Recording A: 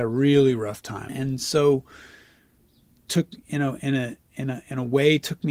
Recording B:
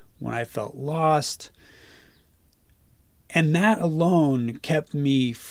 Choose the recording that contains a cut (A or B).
A